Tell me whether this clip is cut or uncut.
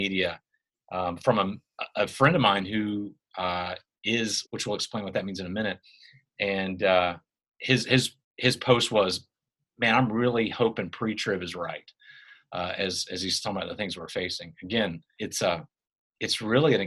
cut